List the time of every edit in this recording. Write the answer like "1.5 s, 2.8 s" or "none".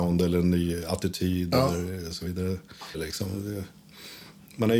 2.9 s

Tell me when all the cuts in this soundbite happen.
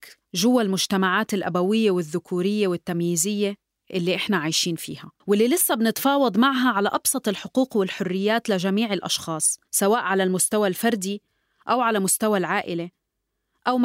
5.2 s, 9.6 s

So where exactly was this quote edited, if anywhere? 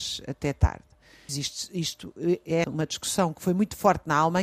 1.3 s, 2.6 s

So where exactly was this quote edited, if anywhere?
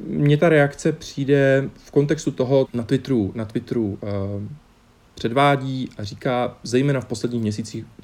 2.6 s

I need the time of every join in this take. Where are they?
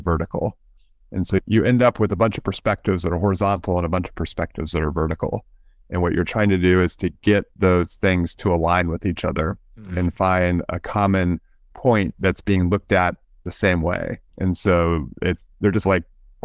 none

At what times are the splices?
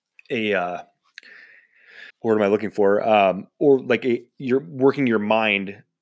2.1 s

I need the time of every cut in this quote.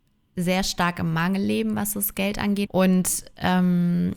2.7 s

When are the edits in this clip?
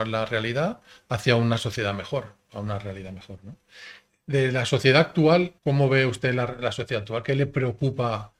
5.6 s

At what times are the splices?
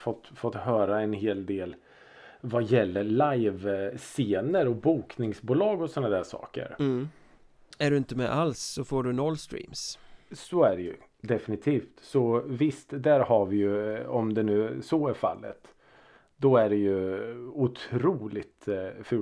7.8 s

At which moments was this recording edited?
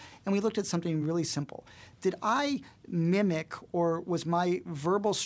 none

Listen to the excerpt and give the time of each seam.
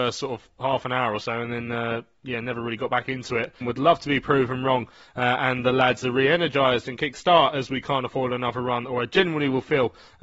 3.6 s

